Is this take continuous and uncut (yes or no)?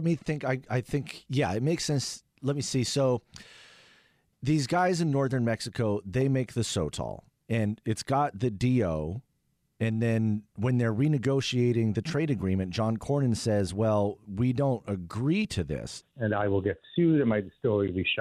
no